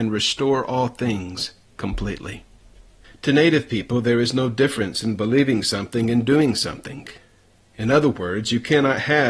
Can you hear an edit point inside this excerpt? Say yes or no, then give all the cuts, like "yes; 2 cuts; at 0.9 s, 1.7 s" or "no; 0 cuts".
no; 0 cuts